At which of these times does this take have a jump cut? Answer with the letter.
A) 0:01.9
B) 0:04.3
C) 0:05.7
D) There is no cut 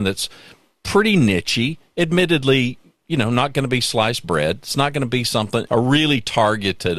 C